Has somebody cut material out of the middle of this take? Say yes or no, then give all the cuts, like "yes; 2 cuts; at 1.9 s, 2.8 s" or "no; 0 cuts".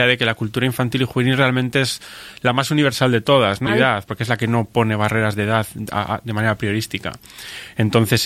yes; 1 cut; at 3.7 s